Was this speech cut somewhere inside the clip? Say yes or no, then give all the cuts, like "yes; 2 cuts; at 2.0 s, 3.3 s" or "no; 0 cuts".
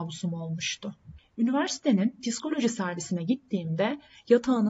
yes; 1 cut; at 1.2 s